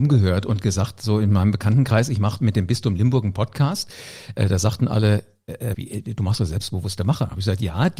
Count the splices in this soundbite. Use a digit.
1